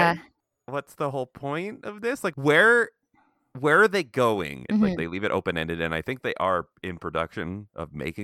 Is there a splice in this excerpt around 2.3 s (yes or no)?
yes